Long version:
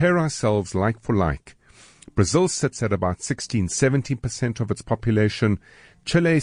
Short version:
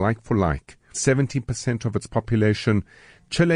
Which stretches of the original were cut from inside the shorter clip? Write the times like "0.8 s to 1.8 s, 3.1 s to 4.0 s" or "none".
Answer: 1.7 s to 3.7 s